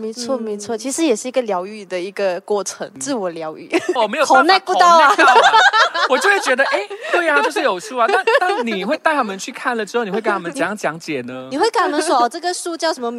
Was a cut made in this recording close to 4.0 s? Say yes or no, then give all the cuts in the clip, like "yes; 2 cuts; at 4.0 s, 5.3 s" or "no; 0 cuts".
yes; 1 cut; at 4.0 s